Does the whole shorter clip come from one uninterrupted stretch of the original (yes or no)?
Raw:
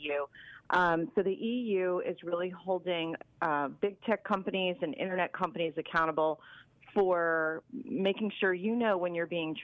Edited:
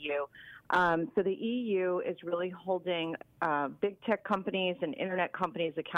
yes